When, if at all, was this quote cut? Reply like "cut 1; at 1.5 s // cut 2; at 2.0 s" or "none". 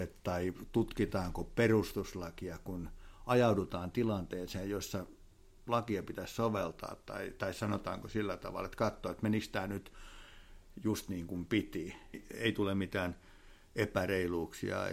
cut 1; at 12.1 s

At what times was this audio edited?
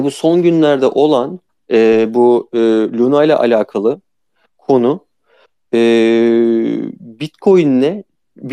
none

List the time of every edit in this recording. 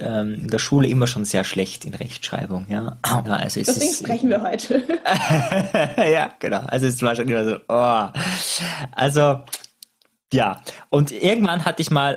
cut 1; at 3.2 s

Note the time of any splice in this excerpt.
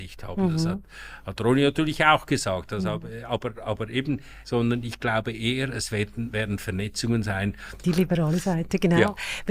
cut 1; at 4.4 s // cut 2; at 7.8 s

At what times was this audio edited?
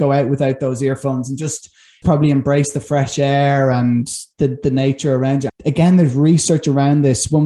cut 1; at 2.0 s // cut 2; at 5.5 s

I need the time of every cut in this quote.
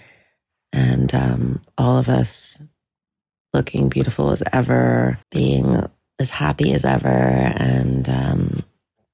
cut 1; at 5.2 s

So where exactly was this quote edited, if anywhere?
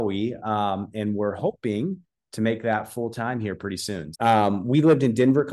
cut 1; at 4.1 s

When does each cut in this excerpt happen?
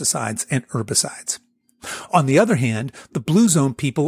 none

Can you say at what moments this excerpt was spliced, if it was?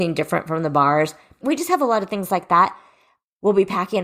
cut 1; at 1.4 s

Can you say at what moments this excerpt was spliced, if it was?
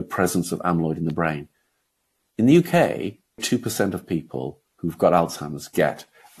cut 1; at 3.4 s

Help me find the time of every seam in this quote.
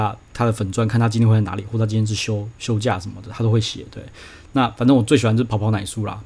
none

